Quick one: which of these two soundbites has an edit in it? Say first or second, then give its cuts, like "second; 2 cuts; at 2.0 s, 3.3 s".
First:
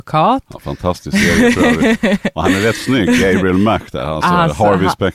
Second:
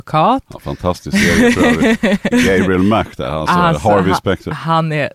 second; 1 cut; at 2.3 s